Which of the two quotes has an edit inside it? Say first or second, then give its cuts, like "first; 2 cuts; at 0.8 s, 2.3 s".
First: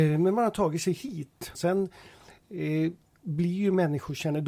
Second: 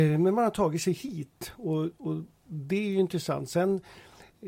first; 1 cut; at 1.5 s